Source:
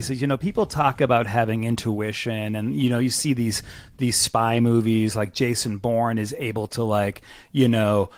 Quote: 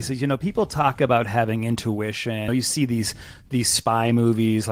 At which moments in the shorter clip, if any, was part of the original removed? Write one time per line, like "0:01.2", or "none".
0:02.5

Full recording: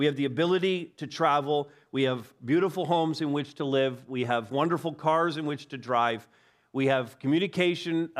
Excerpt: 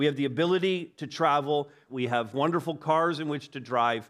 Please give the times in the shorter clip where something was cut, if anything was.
0:01.9

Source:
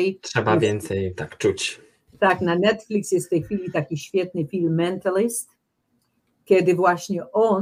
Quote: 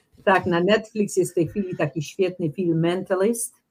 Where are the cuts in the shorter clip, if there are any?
none

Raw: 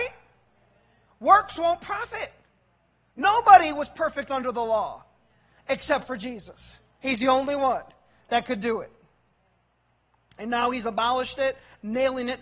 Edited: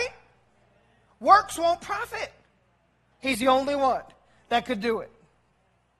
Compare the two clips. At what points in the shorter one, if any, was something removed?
0:03.1

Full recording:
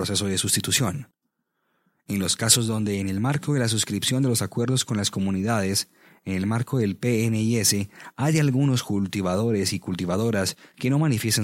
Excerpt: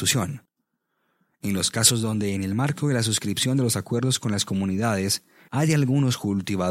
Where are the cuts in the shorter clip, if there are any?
0:05.5

